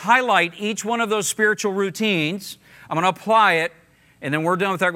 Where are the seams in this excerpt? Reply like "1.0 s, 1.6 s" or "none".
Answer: none